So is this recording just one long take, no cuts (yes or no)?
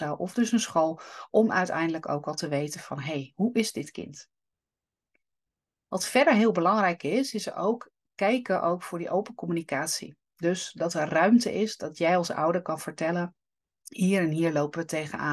yes